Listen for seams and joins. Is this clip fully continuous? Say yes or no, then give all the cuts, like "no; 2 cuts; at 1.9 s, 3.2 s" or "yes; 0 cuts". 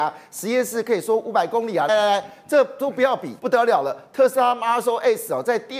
no; 2 cuts; at 1.9 s, 3.4 s